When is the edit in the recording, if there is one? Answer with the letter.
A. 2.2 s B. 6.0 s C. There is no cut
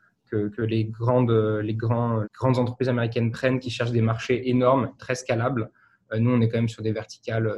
A